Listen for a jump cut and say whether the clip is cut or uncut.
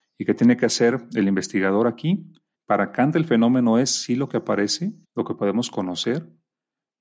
cut